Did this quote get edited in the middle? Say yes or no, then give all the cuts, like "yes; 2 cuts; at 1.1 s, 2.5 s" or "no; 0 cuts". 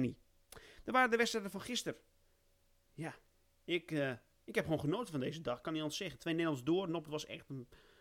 no; 0 cuts